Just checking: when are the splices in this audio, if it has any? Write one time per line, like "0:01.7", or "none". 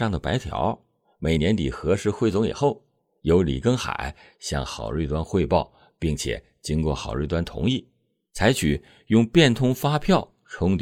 0:01.4